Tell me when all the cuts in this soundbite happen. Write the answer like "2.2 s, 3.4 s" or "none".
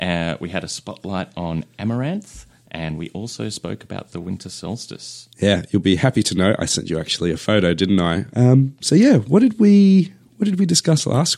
5.3 s, 8.3 s